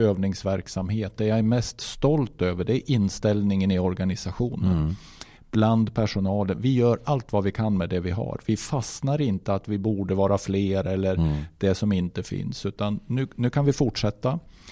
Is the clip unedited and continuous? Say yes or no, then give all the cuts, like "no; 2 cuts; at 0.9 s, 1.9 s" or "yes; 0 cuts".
yes; 0 cuts